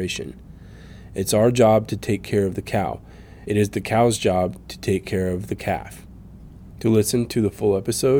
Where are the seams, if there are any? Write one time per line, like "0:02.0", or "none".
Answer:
none